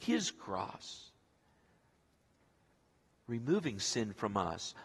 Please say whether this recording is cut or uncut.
uncut